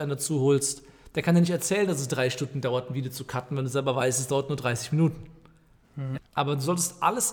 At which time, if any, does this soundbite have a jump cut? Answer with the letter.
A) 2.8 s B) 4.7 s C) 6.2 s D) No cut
C